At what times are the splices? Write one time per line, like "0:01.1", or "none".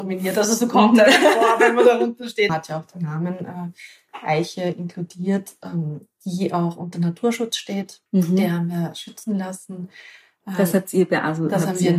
0:02.5
0:08.1